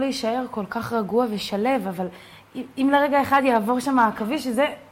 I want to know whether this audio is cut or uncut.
uncut